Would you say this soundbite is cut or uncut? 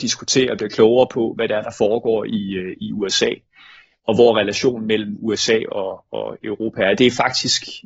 uncut